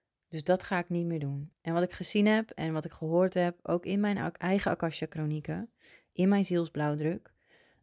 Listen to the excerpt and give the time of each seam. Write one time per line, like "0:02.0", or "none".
0:01.5